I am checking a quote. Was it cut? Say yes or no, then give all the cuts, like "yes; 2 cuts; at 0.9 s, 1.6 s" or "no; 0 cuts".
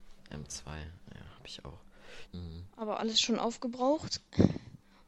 yes; 1 cut; at 2.3 s